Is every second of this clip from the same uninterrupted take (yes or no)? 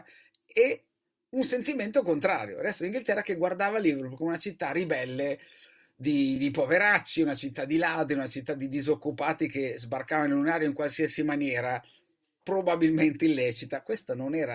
yes